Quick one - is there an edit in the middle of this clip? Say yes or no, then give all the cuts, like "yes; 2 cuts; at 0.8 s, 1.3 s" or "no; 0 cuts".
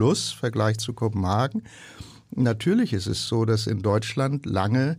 no; 0 cuts